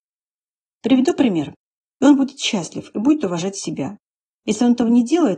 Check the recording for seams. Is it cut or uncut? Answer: cut